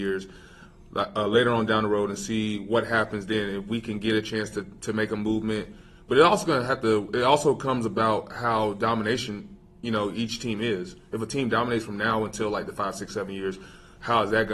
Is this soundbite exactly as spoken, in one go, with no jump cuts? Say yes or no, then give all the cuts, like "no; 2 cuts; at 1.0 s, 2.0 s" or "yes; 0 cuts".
yes; 0 cuts